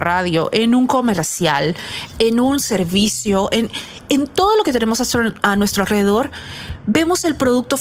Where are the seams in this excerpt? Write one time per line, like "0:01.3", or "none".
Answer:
0:02.1